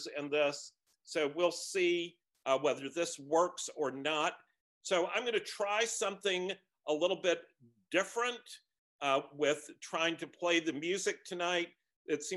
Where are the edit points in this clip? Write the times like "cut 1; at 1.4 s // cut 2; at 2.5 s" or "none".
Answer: cut 1; at 4.6 s